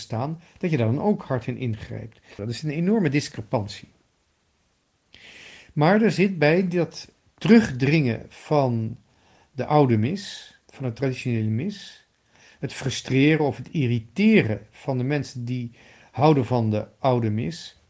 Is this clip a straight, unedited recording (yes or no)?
no